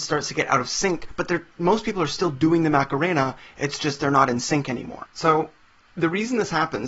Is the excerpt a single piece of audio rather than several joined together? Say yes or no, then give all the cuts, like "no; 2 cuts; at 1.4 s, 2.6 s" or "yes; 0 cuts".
no; 1 cut; at 5.1 s